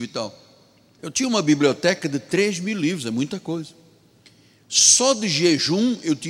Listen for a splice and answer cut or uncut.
cut